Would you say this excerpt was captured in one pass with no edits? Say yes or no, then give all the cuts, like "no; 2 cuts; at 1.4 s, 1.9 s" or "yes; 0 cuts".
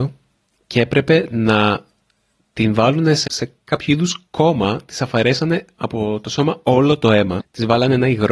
no; 2 cuts; at 3.2 s, 7.4 s